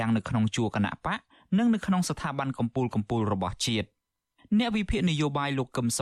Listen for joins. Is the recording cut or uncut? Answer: uncut